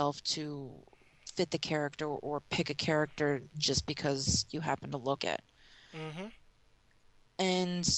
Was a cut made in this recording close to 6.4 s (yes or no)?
no